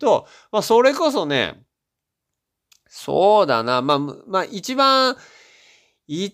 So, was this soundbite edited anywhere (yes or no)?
no